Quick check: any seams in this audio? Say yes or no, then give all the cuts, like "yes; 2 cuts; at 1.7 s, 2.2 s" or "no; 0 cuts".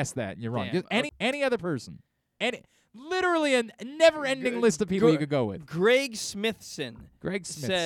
yes; 1 cut; at 1.1 s